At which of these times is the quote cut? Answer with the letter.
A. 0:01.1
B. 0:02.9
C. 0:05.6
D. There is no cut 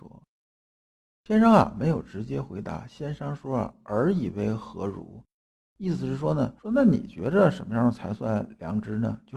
D